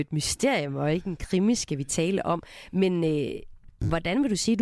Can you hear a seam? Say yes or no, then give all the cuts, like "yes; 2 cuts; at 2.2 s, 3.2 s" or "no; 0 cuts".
no; 0 cuts